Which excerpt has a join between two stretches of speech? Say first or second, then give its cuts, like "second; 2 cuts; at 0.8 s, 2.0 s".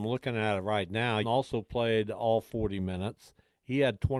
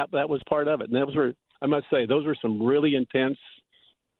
first; 1 cut; at 1.2 s